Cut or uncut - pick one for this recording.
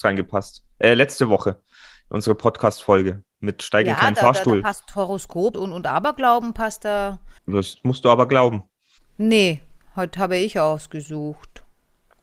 cut